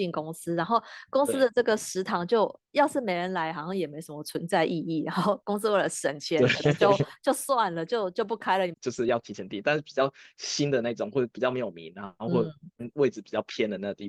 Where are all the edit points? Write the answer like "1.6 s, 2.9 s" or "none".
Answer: 8.7 s